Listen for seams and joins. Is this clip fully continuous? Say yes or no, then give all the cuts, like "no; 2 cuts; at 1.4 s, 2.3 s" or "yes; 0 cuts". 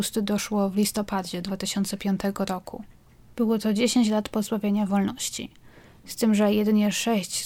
no; 1 cut; at 3.3 s